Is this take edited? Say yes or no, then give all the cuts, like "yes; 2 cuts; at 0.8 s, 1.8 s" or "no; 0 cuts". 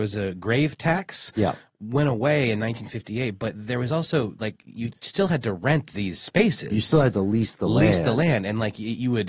no; 0 cuts